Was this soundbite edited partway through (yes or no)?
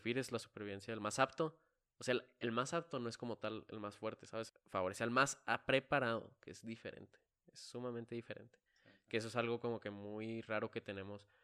yes